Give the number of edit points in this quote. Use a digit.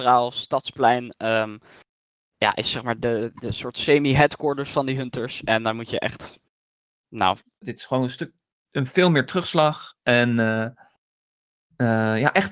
1